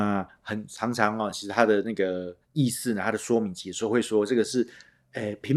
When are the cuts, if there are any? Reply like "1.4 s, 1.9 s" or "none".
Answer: none